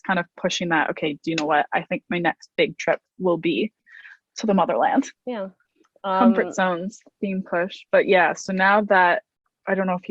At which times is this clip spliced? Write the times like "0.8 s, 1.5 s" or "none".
5.2 s